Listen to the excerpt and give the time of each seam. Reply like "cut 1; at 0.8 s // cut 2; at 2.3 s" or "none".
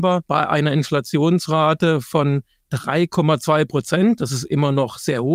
none

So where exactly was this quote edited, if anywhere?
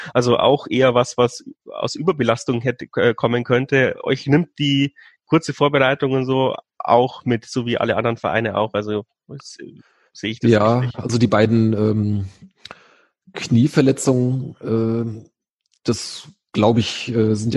none

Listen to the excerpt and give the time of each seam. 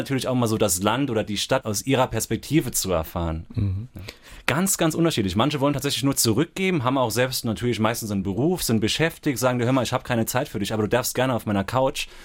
cut 1; at 4.4 s

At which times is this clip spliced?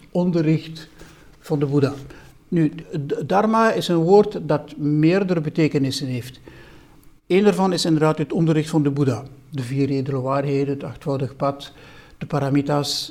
cut 1; at 2.8 s

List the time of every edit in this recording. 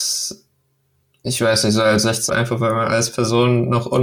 cut 1; at 2.3 s

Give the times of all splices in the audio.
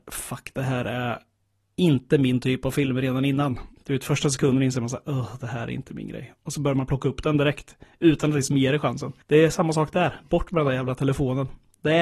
cut 1; at 3.8 s // cut 2; at 9.2 s

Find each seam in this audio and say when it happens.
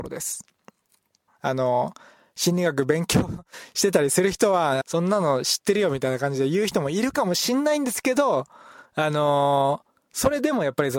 cut 1; at 1.3 s // cut 2; at 4.8 s

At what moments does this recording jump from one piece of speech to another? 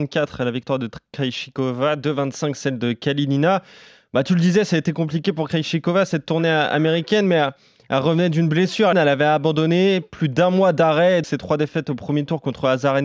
cut 1; at 8.9 s // cut 2; at 11.2 s

